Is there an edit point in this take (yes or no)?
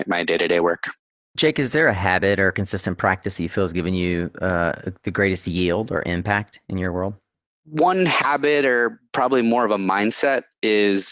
no